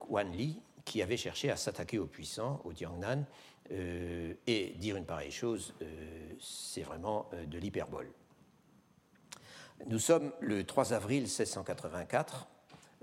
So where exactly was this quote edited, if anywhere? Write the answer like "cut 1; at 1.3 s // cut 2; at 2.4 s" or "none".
cut 1; at 9.8 s

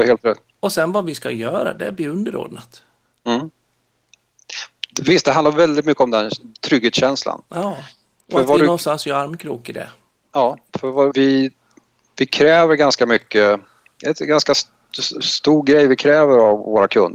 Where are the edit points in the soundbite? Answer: cut 1; at 11.1 s

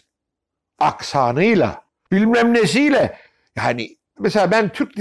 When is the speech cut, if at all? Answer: cut 1; at 2.1 s

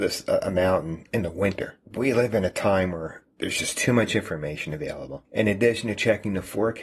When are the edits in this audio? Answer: cut 1; at 1.8 s

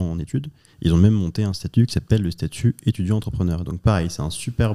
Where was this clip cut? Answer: none

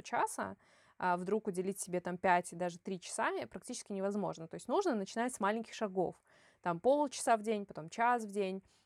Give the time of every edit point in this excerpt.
none

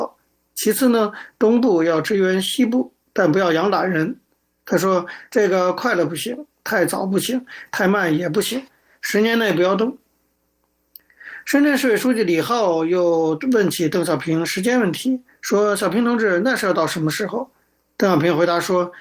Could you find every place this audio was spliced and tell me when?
none

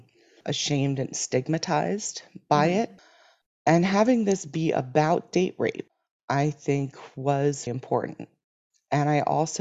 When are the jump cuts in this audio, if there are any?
cut 1; at 7.7 s

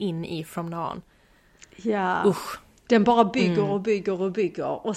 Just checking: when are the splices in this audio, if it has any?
cut 1; at 2.9 s

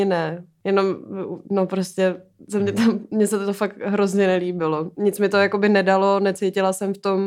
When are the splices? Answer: none

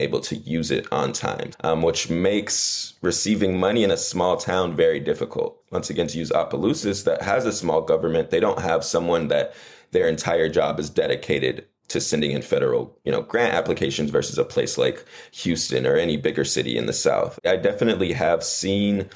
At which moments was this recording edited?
cut 1; at 1.5 s // cut 2; at 17.4 s

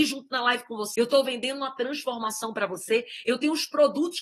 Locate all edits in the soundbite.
cut 1; at 0.9 s

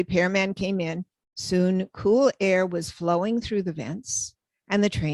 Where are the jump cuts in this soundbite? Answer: none

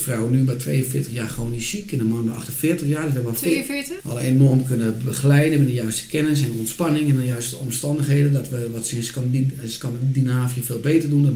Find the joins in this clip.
cut 1; at 4.0 s

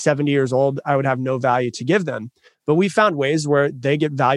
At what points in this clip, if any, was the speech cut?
none

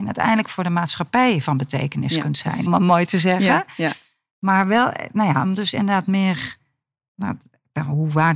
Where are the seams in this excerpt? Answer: cut 1; at 2.7 s

